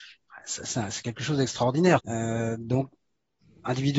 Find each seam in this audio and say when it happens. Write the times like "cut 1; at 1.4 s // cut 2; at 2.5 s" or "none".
cut 1; at 2.0 s